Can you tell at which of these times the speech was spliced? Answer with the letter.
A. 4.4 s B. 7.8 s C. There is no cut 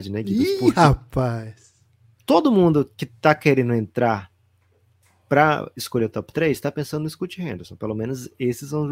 C